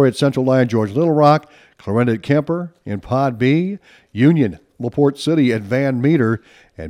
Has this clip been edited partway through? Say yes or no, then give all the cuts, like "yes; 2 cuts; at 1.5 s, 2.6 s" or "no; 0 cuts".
no; 0 cuts